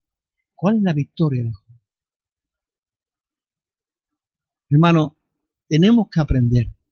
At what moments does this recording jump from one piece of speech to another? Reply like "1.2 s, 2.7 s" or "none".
5.6 s